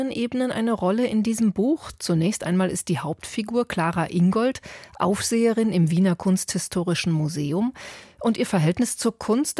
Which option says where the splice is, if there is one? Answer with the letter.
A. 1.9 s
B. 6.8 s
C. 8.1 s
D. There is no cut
D